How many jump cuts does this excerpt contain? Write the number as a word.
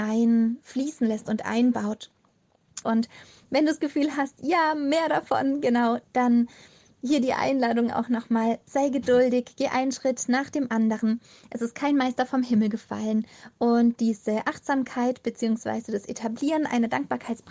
one